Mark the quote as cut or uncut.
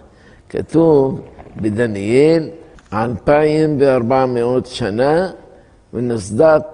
uncut